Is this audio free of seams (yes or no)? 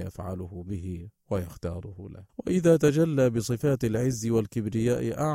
no